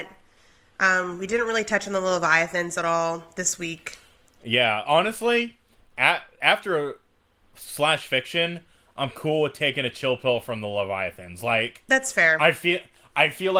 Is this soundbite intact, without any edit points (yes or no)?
yes